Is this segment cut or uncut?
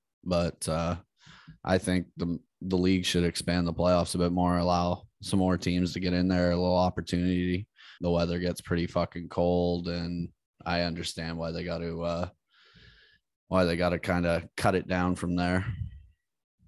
cut